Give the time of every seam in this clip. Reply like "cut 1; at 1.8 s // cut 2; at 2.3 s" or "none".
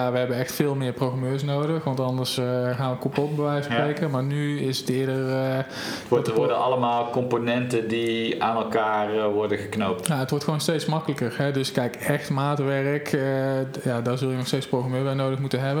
none